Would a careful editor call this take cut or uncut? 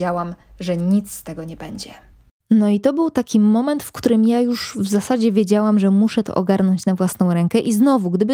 uncut